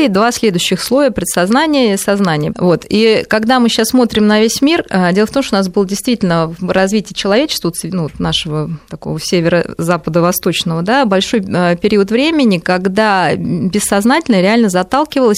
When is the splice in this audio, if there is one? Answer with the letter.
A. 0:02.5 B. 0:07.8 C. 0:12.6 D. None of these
A